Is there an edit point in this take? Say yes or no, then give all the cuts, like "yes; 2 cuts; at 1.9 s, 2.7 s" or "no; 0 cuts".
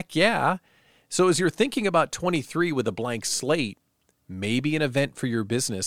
no; 0 cuts